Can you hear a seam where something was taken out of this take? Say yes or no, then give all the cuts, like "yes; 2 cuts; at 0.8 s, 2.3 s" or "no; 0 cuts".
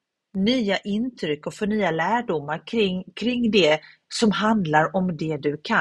no; 0 cuts